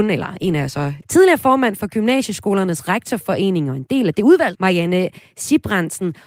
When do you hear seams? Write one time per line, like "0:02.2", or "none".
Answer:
0:01.0
0:04.5

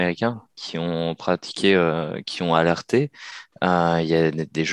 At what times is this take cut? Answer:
none

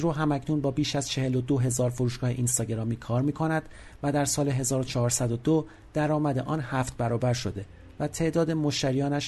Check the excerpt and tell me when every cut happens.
none

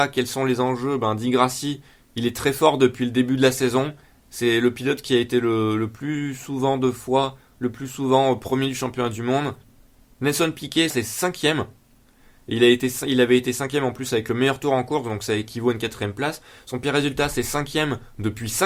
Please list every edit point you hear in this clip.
0:10.9

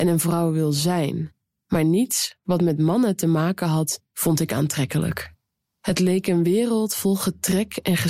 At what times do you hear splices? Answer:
none

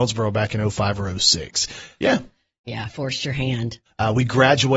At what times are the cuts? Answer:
0:02.0
0:03.8

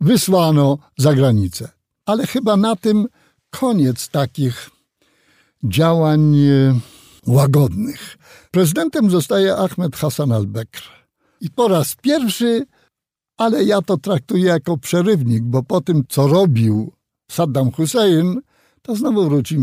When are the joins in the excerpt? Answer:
0:07.2
0:11.4

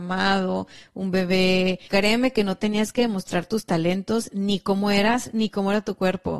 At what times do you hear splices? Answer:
0:01.9

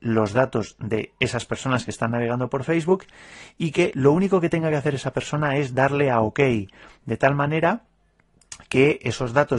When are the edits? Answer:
none

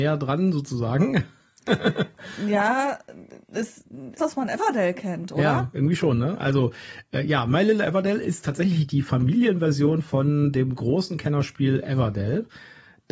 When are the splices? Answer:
0:04.2

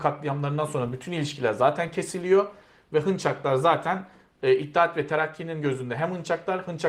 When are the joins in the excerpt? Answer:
none

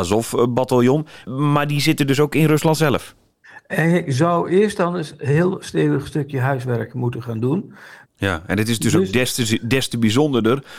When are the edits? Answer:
0:01.2
0:08.0

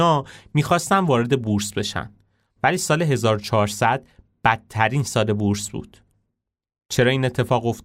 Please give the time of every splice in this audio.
0:02.6

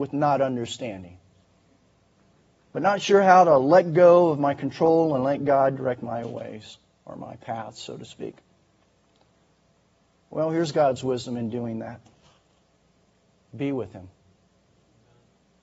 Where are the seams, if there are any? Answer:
none

